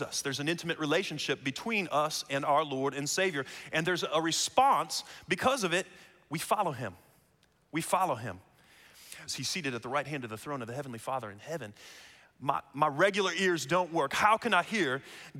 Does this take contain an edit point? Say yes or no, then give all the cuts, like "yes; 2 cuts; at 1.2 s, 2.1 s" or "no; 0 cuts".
yes; 1 cut; at 9.3 s